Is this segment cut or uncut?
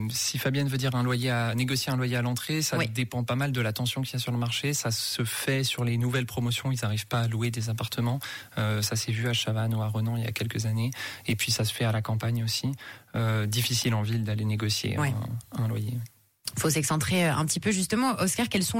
uncut